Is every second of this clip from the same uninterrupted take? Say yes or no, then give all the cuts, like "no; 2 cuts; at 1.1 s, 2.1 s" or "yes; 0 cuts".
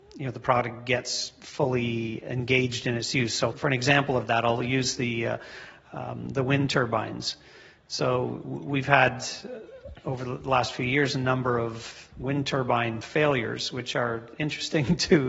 no; 1 cut; at 3.5 s